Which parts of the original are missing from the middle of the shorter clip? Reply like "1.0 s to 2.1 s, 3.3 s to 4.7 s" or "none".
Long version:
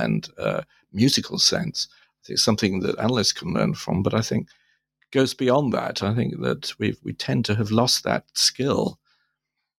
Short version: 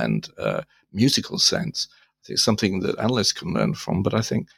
none